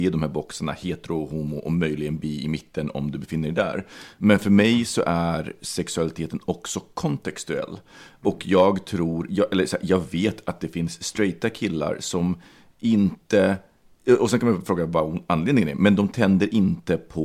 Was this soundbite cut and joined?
no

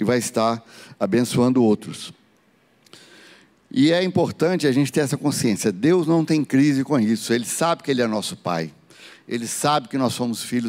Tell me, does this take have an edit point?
no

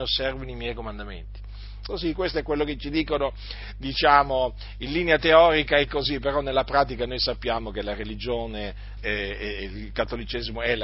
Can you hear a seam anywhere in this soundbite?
yes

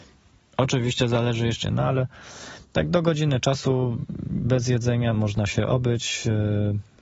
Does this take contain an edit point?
yes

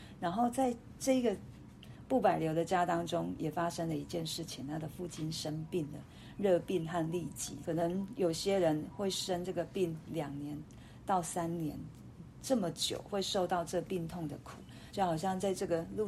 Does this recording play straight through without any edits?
no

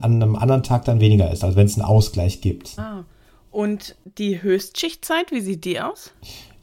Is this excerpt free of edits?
no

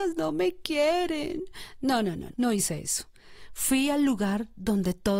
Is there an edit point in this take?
yes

